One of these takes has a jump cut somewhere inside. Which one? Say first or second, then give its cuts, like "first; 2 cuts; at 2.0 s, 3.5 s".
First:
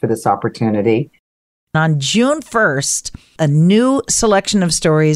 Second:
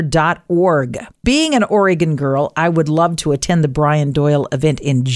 second; 1 cut; at 1.2 s